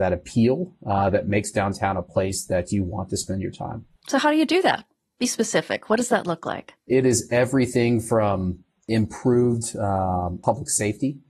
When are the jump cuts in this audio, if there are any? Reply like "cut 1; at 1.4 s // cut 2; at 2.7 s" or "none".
cut 1; at 4.0 s